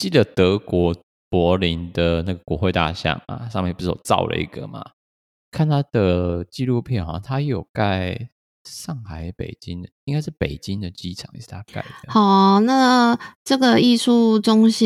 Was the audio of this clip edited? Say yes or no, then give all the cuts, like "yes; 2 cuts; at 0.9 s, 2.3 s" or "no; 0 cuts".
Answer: no; 0 cuts